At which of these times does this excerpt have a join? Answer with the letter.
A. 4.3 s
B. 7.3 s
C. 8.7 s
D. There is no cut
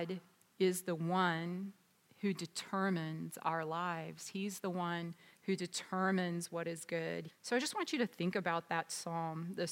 B